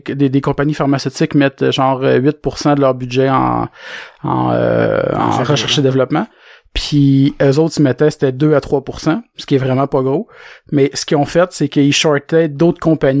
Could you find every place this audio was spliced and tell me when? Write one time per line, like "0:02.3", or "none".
none